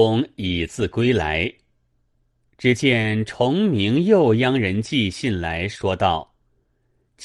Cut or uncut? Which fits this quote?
uncut